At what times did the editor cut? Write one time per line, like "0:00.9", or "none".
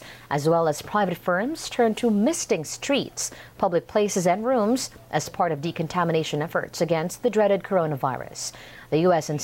none

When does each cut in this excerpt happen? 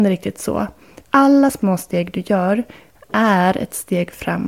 0:01.0

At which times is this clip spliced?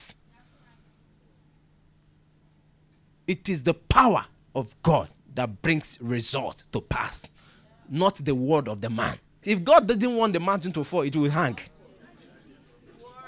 0:09.4

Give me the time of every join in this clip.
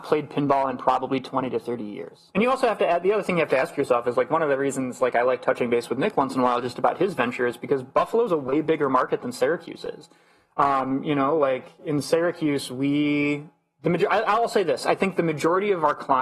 0:02.3

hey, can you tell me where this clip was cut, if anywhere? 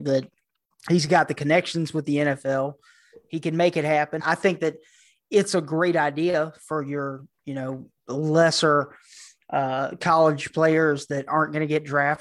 0:04.2

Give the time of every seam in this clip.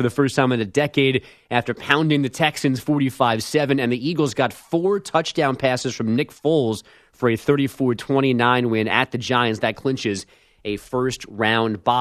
none

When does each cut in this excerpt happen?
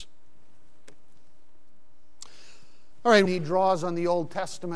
0:03.3

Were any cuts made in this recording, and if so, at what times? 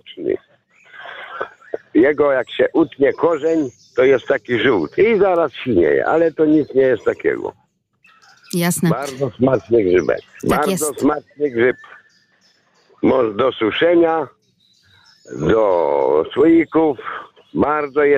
0:10.4

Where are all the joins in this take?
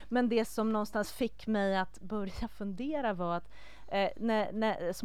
none

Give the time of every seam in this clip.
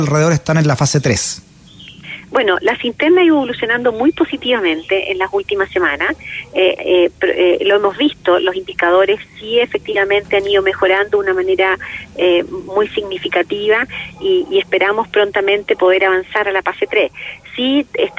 0:06.8

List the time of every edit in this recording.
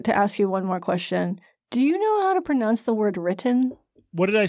none

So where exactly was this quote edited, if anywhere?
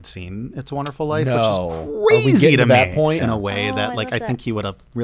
0:03.2

